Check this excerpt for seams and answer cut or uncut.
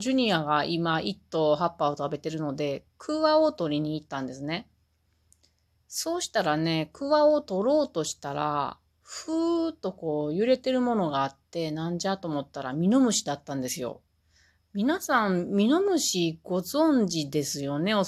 uncut